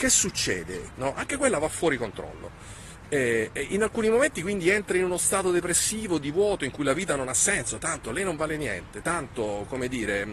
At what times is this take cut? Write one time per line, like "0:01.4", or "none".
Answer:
0:00.9